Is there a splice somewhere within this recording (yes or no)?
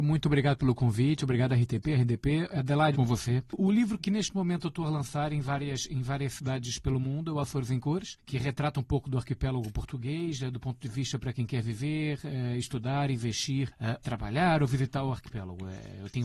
yes